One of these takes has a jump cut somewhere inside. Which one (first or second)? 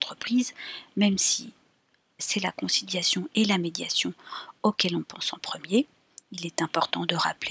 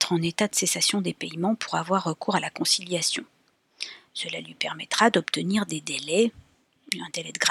first